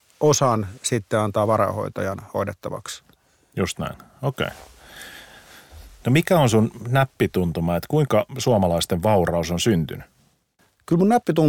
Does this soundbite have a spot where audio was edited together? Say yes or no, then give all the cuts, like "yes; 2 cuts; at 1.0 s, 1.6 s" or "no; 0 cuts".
no; 0 cuts